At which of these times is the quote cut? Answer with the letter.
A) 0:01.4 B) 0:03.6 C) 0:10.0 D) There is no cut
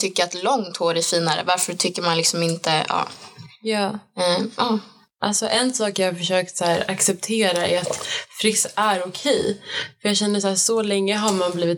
D